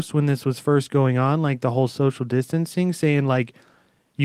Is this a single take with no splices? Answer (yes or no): yes